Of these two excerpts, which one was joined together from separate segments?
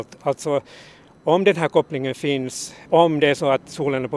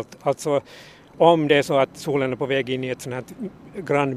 second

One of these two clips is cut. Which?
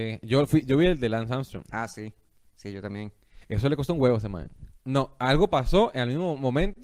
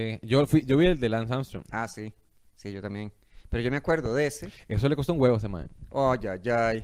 first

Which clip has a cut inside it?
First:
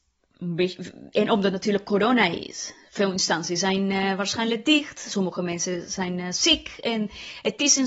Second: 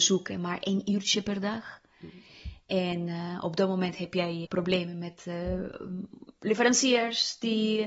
second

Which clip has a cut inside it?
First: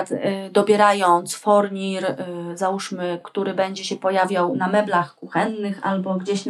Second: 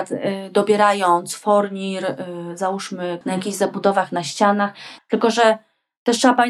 second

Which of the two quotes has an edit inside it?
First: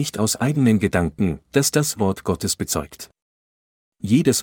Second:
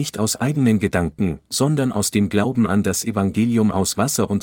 first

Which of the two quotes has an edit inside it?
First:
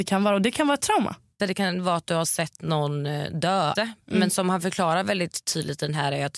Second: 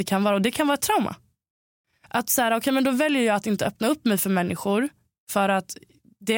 first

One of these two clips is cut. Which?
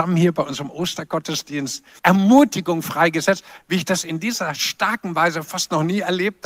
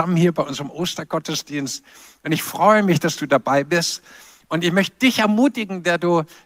first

